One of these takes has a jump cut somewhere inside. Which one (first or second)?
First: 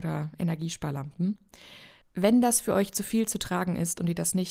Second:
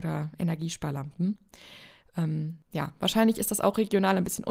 first